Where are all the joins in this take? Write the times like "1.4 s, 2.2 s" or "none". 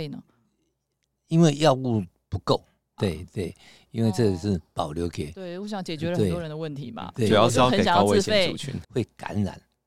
3.0 s, 8.8 s

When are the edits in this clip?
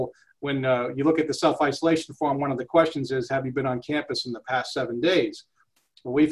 none

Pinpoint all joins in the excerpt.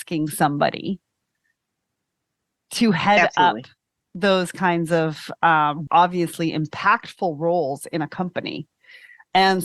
5.9 s

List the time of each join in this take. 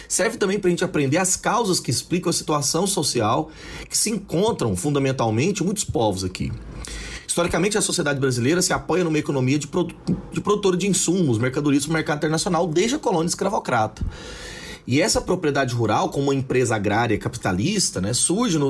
none

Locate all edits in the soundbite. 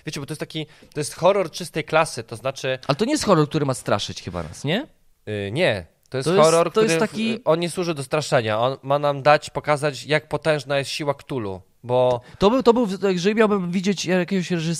none

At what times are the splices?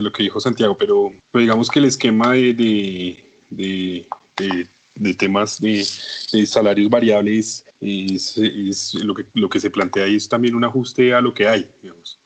1.2 s, 7.7 s

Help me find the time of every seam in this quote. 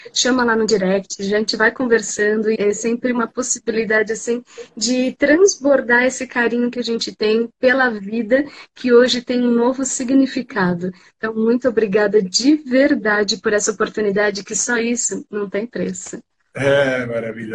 2.6 s

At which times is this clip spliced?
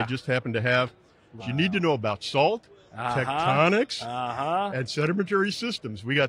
1.4 s

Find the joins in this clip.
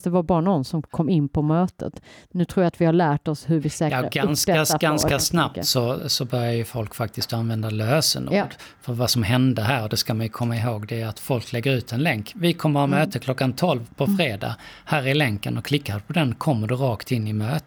6.0 s

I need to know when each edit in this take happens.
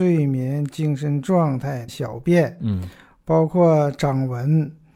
1.9 s

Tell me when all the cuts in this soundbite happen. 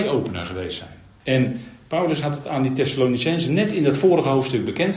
1.2 s

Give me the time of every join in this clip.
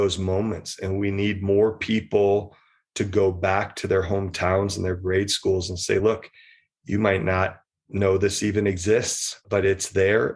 none

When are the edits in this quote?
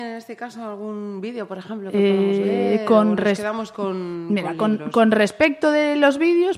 none

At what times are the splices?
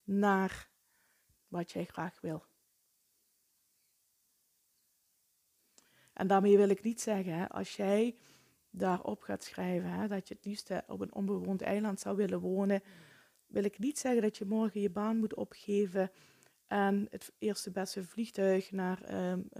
1.3 s

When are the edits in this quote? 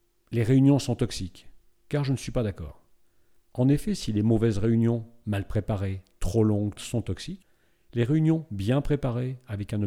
6.8 s

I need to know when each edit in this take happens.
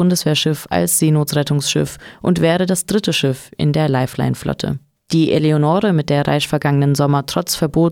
none

